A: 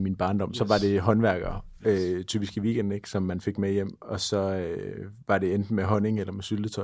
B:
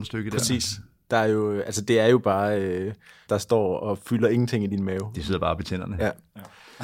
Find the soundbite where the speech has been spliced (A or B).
B